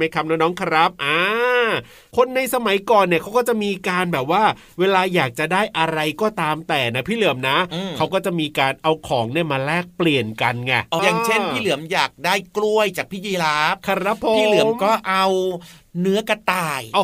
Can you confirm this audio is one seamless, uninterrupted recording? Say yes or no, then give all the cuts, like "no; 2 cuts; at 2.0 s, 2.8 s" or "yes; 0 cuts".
no; 1 cut; at 11.0 s